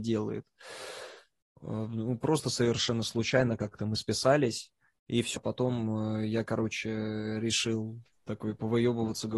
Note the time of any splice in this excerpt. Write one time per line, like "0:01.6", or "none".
0:01.5
0:05.4